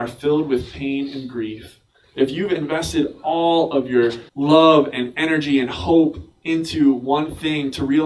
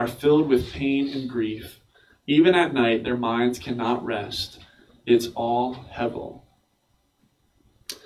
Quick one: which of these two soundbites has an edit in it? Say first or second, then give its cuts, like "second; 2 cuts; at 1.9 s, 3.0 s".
first; 2 cuts; at 2.0 s, 4.3 s